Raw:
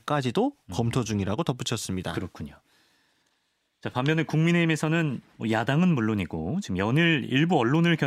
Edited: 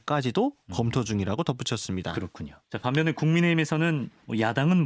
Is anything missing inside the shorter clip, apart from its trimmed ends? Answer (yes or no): yes